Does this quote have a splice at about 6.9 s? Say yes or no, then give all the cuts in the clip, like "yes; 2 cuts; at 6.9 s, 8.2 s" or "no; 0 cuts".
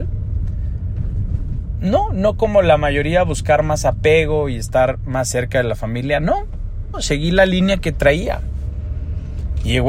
yes; 1 cut; at 6.9 s